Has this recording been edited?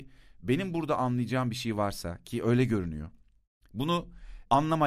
no; 0 cuts

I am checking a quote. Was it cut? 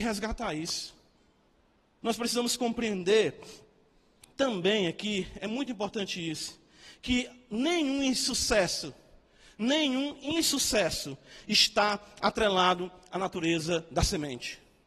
yes; 1 cut; at 2.0 s

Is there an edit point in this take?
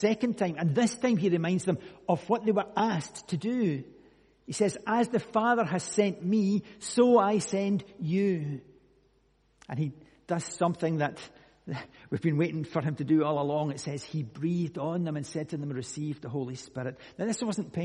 no; 0 cuts

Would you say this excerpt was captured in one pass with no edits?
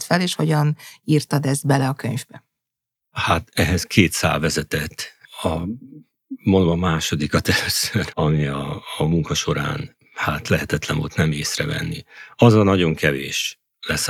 no; 1 cut; at 8.1 s

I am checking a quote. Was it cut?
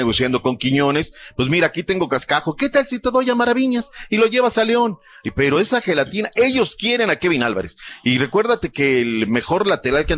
no; 0 cuts

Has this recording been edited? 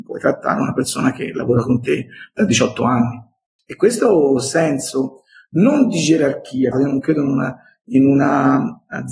yes; 2 cuts; at 3.6 s, 6.7 s

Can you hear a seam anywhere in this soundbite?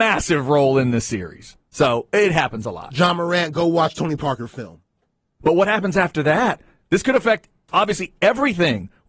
yes; 1 cut; at 5.4 s

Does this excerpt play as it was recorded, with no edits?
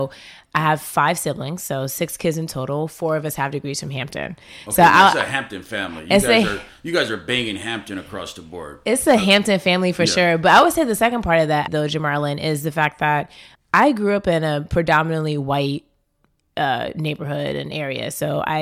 no; 2 cuts; at 11.7 s, 13.5 s

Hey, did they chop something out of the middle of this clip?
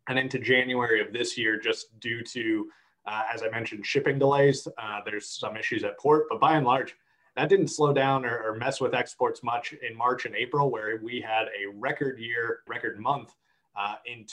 yes; 1 cut; at 12.7 s

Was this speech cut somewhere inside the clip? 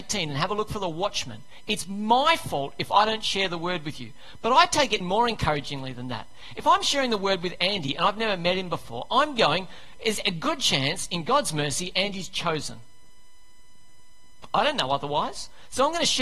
yes; 1 cut; at 5.0 s

